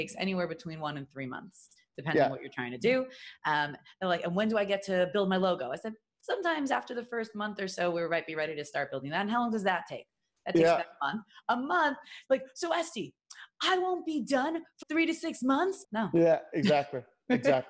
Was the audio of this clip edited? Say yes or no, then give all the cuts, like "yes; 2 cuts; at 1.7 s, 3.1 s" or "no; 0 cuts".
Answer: yes; 2 cuts; at 14.8 s, 15.8 s